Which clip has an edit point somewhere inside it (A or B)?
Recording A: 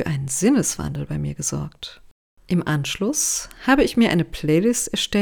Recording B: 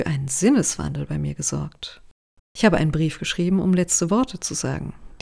B